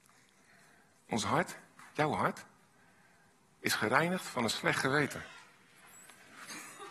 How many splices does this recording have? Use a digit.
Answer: 0